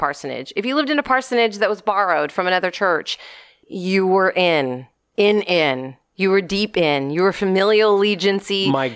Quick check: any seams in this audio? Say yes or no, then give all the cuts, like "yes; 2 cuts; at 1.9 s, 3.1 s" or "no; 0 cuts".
no; 0 cuts